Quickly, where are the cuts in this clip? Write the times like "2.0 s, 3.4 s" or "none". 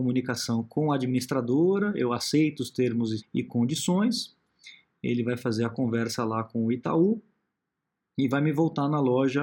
3.2 s